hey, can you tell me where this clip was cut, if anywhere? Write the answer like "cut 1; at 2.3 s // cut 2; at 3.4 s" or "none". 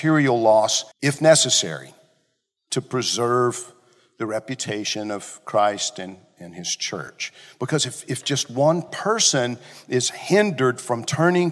cut 1; at 0.9 s